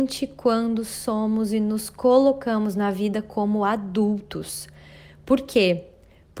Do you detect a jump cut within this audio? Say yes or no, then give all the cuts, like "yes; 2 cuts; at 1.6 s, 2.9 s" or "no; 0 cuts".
no; 0 cuts